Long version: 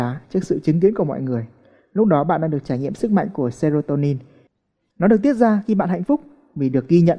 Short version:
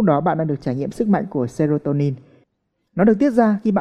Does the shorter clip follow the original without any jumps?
yes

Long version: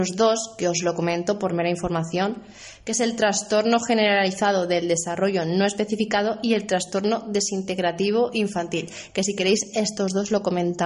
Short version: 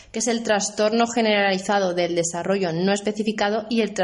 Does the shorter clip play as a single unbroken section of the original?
yes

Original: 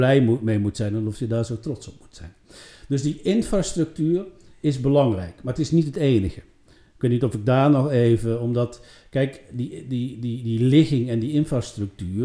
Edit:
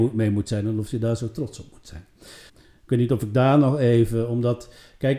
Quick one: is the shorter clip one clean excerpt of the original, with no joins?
no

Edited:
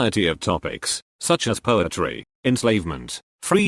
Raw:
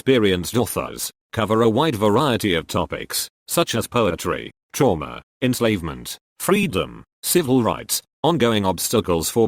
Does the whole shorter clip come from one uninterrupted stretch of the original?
no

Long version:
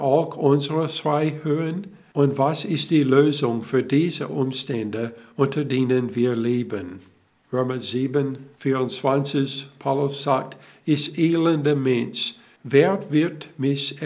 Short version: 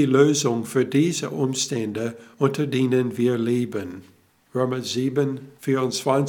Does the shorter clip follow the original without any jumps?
yes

